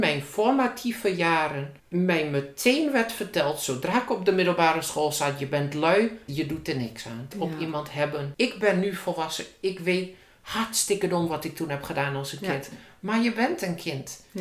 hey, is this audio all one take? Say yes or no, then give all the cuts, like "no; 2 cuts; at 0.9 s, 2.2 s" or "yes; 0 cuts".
no; 3 cuts; at 1.8 s, 6.3 s, 7.3 s